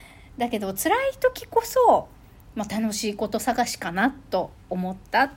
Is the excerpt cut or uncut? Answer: uncut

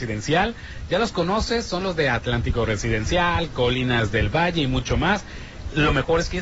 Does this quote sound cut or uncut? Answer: uncut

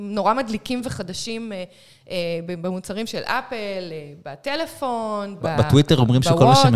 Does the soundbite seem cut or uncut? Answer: cut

